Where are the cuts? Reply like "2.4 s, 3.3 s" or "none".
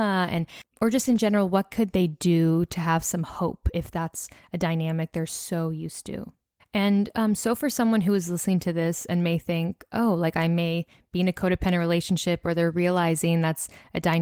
6.6 s